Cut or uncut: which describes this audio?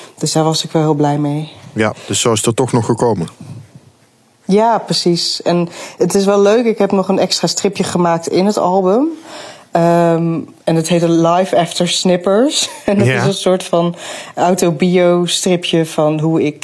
uncut